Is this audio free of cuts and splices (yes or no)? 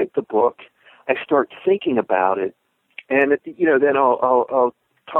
yes